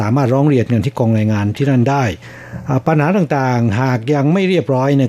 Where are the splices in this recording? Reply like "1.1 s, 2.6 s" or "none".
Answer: none